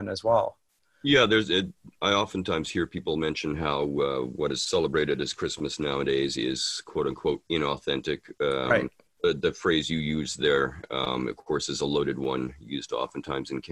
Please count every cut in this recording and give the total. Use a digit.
0